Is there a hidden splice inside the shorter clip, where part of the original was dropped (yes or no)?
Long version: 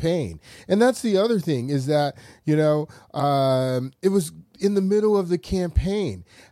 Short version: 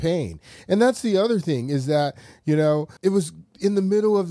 yes